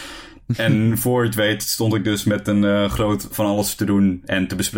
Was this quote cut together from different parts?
yes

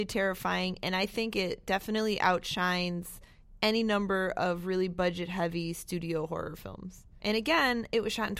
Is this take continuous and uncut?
no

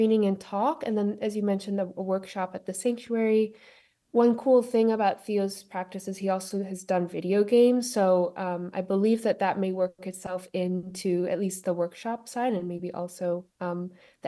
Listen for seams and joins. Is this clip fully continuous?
yes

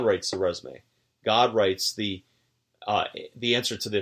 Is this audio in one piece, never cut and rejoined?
yes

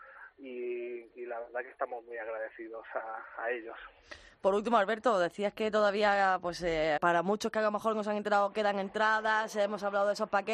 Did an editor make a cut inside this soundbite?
yes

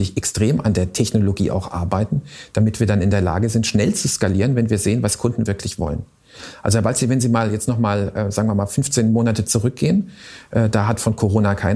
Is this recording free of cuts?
yes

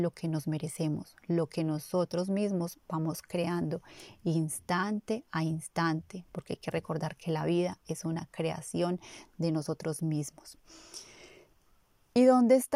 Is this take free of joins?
yes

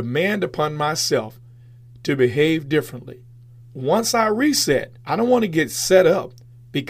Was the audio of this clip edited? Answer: yes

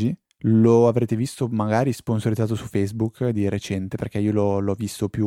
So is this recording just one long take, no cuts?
yes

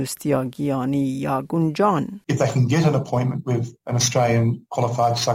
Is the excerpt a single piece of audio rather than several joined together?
no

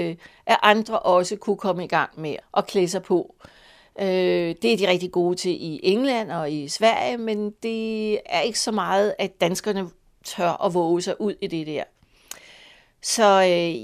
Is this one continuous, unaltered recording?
no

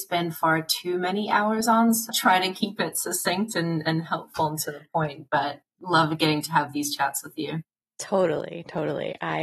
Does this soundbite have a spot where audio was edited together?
yes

